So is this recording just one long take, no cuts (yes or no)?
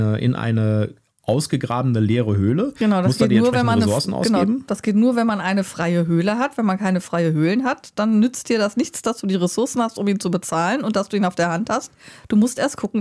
yes